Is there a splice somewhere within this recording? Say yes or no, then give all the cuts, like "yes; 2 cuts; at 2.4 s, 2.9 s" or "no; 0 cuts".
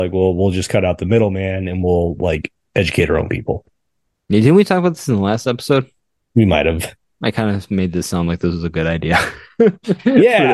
no; 0 cuts